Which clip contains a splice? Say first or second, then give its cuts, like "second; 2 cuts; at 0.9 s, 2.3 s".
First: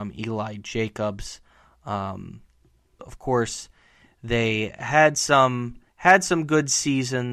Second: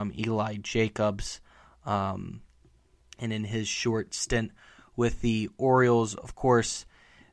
first; 2 cuts; at 3.0 s, 5.9 s